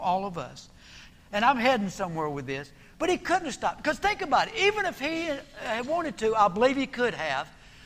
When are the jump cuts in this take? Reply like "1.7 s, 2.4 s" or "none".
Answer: 1.1 s

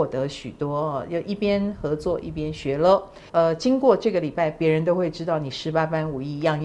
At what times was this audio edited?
3.3 s

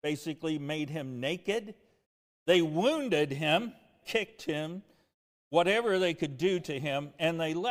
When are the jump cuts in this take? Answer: 4.0 s

